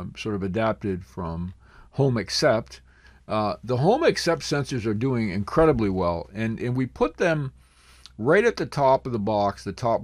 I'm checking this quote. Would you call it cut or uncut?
uncut